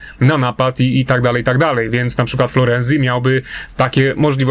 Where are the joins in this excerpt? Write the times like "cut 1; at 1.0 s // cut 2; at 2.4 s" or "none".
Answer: none

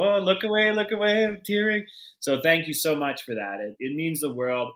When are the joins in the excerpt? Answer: cut 1; at 3.8 s

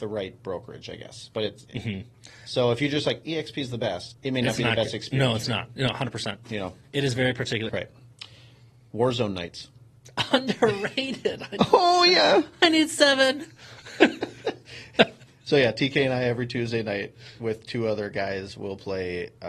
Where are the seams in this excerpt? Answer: cut 1; at 4.1 s // cut 2; at 7.7 s

